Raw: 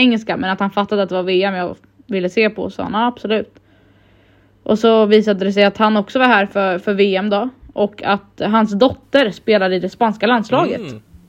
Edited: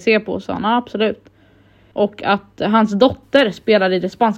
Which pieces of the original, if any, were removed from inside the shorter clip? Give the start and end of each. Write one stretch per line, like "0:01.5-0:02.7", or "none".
0:04.2-0:07.7